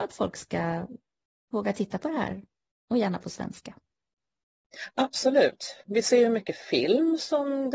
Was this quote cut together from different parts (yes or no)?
no